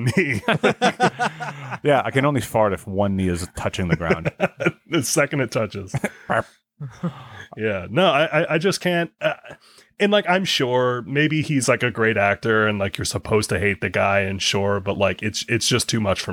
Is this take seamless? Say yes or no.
yes